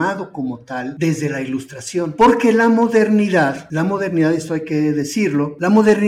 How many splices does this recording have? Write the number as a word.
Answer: zero